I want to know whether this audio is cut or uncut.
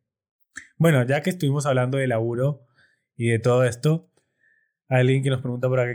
uncut